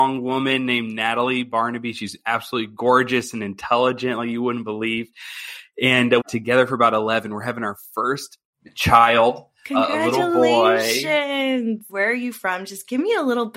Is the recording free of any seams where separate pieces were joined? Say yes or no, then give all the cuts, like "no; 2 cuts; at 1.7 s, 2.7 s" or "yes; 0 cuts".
no; 2 cuts; at 6.2 s, 11.9 s